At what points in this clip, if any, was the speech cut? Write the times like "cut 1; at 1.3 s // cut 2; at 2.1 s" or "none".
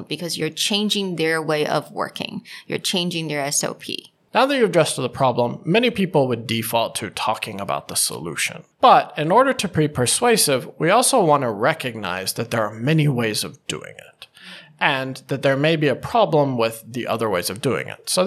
none